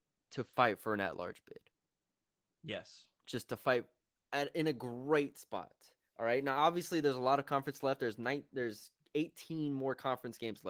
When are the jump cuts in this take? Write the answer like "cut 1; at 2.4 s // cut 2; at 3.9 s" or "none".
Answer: none